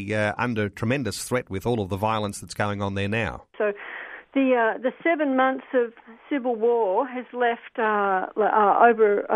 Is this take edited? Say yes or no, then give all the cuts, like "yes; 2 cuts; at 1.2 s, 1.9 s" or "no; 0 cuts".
yes; 1 cut; at 3.5 s